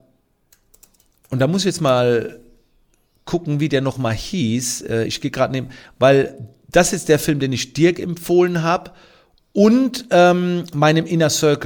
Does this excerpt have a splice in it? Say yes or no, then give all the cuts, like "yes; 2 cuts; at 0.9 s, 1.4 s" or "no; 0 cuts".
no; 0 cuts